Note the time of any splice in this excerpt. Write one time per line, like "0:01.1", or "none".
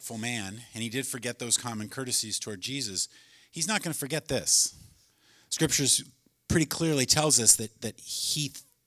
none